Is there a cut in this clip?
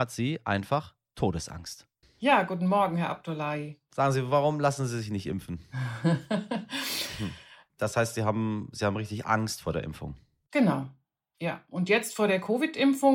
yes; 2 cuts; at 2.0 s, 7.7 s

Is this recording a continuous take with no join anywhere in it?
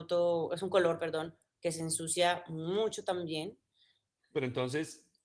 no; 1 cut; at 4.2 s

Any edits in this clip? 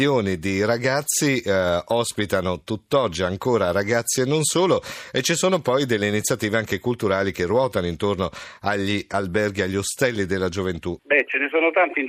yes; 1 cut; at 11.0 s

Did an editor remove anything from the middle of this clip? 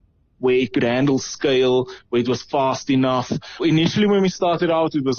yes; 1 cut; at 3.6 s

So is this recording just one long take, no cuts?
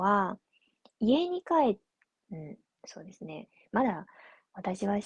no; 1 cut; at 2.1 s

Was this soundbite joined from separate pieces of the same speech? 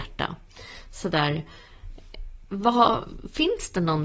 no; 0 cuts

